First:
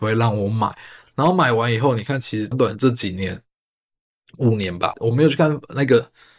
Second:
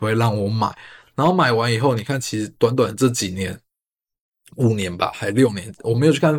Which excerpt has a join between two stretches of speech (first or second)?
first